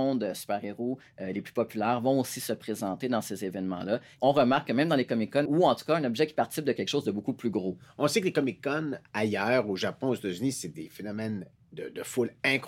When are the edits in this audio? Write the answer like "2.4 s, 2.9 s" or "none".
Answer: 4.2 s, 5.5 s